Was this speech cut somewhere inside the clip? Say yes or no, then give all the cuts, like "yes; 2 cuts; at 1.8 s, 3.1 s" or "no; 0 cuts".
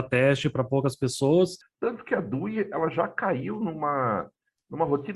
yes; 1 cut; at 1.6 s